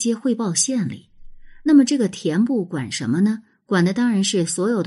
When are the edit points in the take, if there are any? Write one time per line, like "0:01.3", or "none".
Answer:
none